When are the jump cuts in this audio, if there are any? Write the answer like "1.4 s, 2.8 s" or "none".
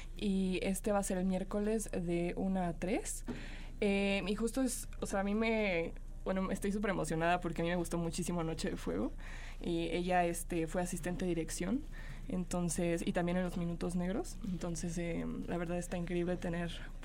none